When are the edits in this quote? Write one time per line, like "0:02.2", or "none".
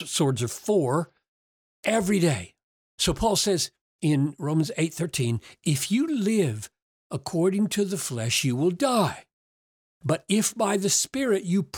none